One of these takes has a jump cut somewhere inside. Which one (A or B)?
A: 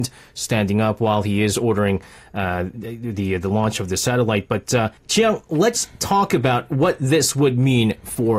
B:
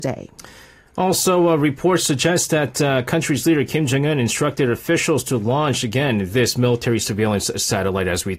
A